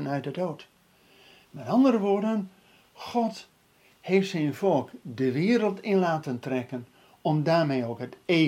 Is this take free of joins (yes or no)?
yes